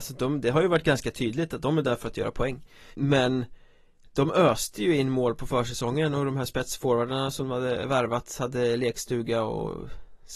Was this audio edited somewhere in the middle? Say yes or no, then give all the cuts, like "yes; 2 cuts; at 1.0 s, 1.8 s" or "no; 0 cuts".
yes; 1 cut; at 2.9 s